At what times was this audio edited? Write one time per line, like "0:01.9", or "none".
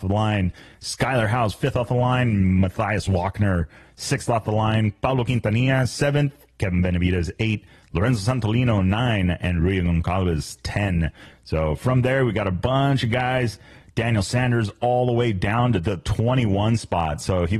none

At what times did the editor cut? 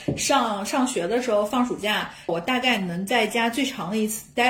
0:02.3

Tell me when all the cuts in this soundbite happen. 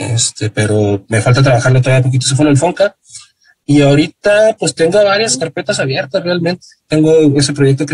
none

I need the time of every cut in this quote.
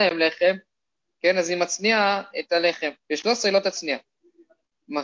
0:03.0

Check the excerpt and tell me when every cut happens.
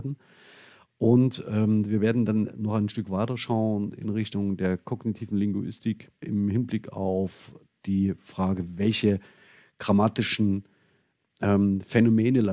0:06.2

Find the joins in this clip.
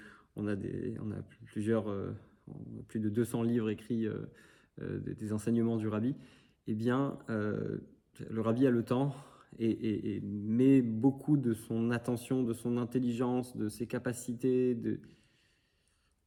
none

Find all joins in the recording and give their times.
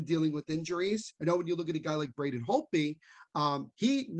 0:01.2

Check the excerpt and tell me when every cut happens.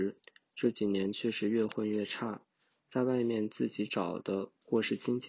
none

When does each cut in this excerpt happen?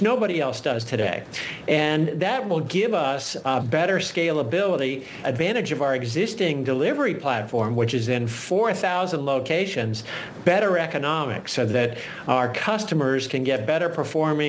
0:03.6
0:05.2

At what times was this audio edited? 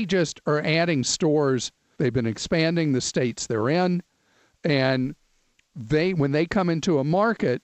0:02.0

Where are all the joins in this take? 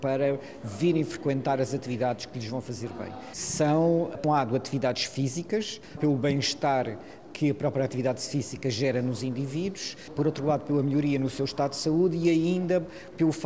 0:04.2

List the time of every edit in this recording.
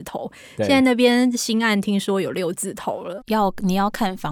0:03.2

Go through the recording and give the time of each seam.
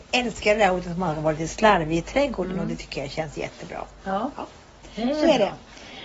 none

